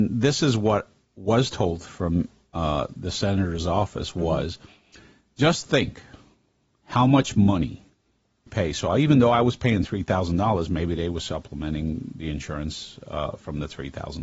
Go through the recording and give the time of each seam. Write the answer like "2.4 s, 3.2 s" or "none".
8.5 s